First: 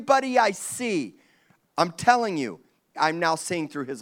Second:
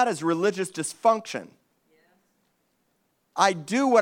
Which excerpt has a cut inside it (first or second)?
first